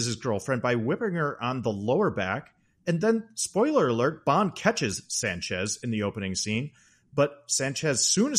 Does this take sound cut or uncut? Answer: cut